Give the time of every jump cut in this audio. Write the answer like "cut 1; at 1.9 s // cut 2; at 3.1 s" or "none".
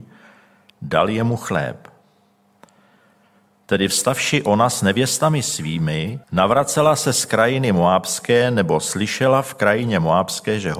cut 1; at 3.5 s // cut 2; at 6.2 s